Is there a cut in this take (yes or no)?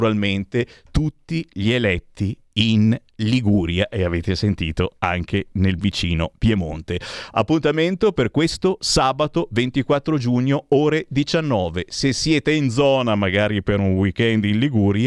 no